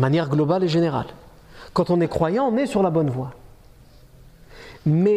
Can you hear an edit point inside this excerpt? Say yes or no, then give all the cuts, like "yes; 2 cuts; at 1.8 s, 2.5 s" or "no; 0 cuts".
no; 0 cuts